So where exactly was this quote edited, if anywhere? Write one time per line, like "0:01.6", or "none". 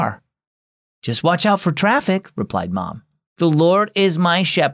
0:03.3